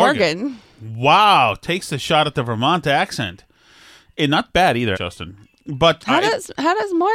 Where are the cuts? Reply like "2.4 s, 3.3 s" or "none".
4.9 s, 6.0 s